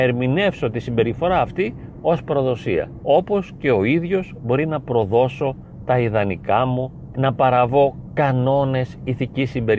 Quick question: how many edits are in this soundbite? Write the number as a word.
two